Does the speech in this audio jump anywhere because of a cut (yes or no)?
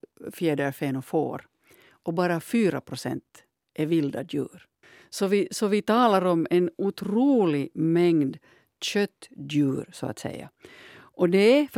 no